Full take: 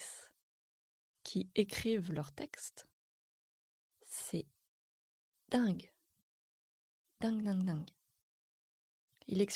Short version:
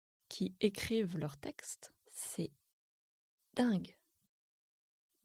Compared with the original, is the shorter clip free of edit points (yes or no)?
no